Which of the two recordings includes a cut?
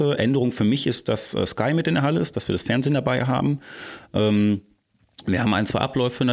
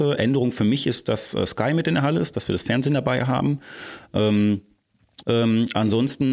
second; 1 cut; at 5.2 s

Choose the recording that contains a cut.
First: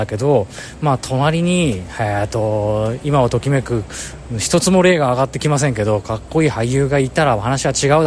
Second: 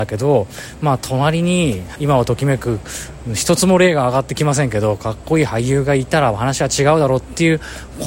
second; 1 cut; at 1.9 s

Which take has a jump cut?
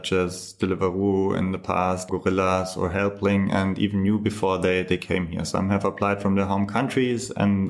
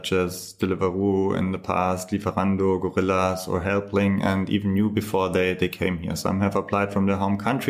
first; 1 cut; at 2.1 s

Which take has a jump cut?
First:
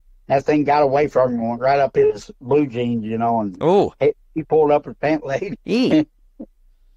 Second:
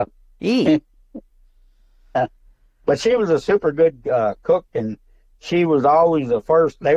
first; 1 cut; at 5.5 s

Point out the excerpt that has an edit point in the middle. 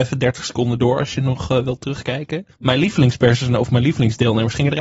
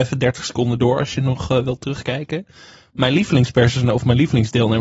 first; 1 cut; at 2.5 s

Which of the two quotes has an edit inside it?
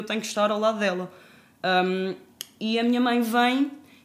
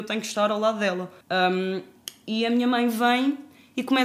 second; 1 cut; at 1.2 s

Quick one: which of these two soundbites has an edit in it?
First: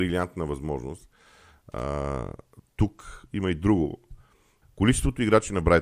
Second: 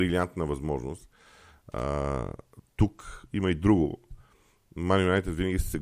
first; 1 cut; at 4.6 s

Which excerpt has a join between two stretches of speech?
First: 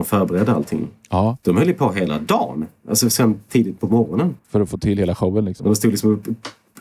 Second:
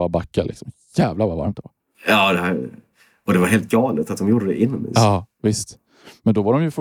first; 1 cut; at 4.4 s

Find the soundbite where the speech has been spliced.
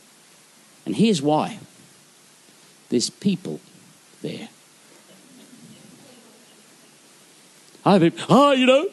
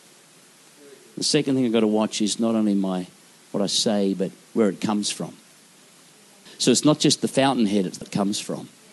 second; 2 cuts; at 6.5 s, 8.0 s

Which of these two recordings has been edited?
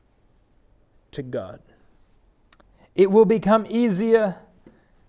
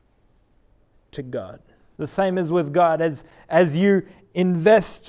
second; 1 cut; at 2.0 s

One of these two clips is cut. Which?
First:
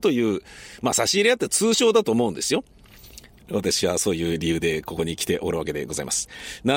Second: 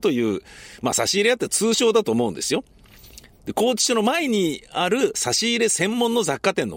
first; 1 cut; at 3.3 s

